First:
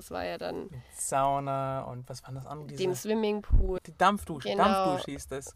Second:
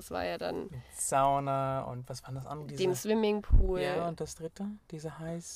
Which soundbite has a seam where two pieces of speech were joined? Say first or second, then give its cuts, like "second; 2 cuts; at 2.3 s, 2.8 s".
first; 1 cut; at 3.8 s